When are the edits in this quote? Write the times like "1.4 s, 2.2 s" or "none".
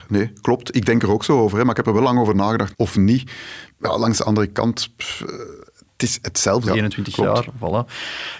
2.7 s, 6.7 s